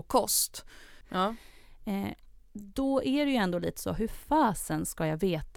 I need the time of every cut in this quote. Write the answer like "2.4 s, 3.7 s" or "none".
1.0 s